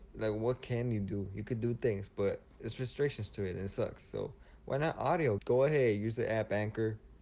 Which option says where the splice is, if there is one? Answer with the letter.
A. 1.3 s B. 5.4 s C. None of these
B